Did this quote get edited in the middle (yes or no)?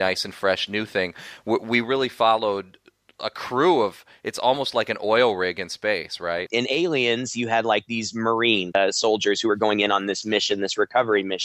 yes